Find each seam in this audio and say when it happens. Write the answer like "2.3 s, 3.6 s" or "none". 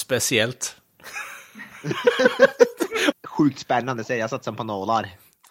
3.1 s